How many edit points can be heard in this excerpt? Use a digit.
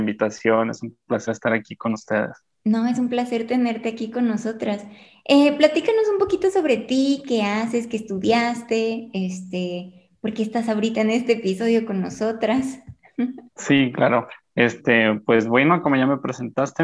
1